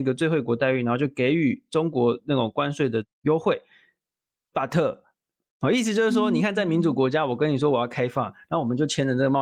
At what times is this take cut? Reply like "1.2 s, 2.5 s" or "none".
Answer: 5.5 s